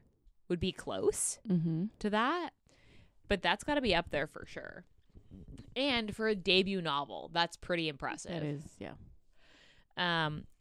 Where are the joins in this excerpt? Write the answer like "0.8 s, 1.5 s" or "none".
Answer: none